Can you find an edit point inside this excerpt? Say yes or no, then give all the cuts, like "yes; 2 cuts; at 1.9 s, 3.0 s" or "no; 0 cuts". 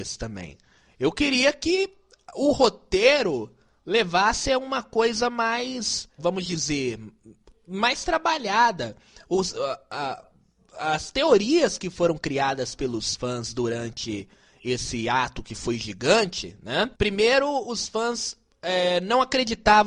yes; 2 cuts; at 6.2 s, 16.9 s